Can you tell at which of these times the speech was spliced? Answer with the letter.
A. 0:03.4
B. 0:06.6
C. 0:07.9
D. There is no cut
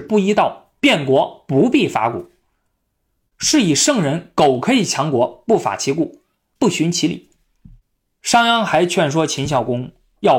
B